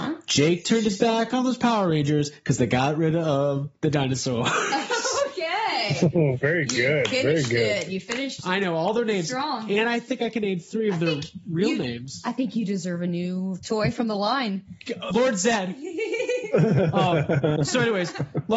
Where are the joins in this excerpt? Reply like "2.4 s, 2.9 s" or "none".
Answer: 15.1 s